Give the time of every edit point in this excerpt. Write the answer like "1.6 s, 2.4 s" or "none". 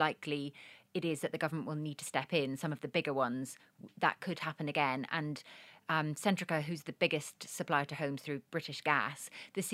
none